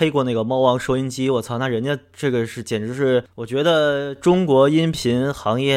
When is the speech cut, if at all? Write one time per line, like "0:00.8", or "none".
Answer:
none